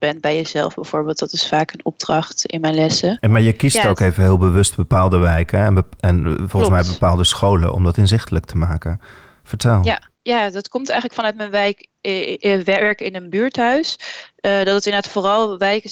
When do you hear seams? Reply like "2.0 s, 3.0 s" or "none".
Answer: none